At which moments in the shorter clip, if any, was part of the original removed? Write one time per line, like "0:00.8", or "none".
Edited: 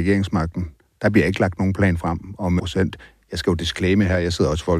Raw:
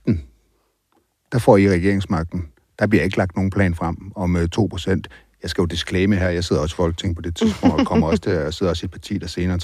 0:02.6